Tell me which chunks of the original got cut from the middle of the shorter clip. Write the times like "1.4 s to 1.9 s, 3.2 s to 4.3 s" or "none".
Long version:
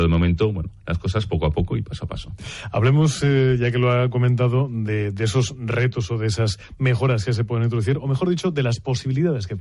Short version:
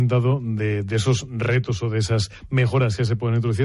none